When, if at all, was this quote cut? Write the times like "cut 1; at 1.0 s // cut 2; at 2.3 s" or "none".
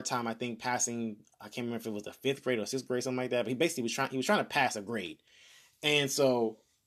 none